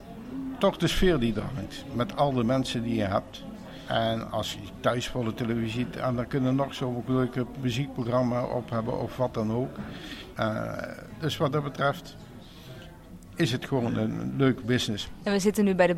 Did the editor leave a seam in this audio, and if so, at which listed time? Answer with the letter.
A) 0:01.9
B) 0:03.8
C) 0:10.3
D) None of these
C